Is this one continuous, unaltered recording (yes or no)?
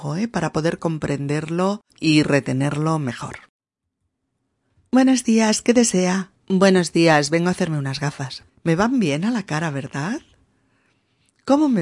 no